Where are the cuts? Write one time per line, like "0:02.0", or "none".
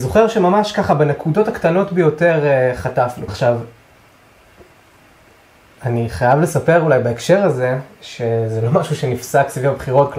0:03.3